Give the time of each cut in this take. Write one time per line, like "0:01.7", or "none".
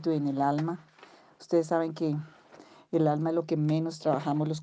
none